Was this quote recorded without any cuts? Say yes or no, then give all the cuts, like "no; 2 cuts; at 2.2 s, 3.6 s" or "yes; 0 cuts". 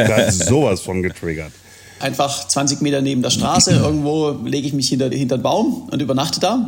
no; 2 cuts; at 2.0 s, 5.1 s